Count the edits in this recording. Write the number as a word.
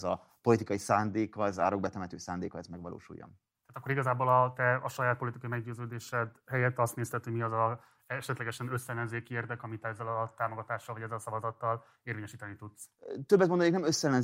zero